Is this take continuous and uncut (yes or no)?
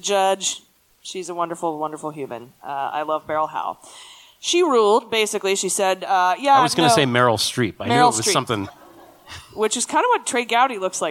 no